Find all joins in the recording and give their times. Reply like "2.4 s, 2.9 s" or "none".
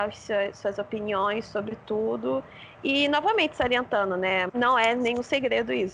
4.5 s